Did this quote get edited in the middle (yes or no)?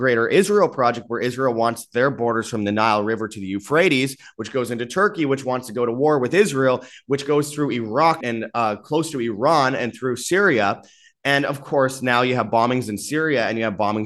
yes